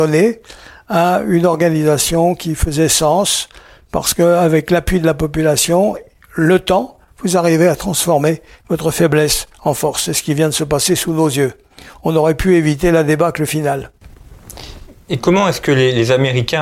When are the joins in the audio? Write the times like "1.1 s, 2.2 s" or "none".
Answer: none